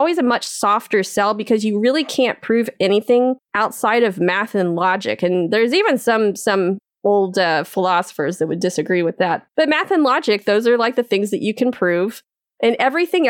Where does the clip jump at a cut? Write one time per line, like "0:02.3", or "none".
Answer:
0:03.4